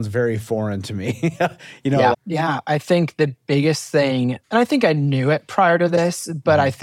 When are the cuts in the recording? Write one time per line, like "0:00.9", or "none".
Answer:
0:02.1